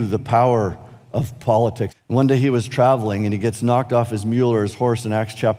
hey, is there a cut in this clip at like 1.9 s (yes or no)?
yes